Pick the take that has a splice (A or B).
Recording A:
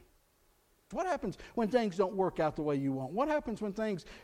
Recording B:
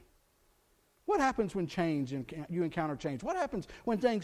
A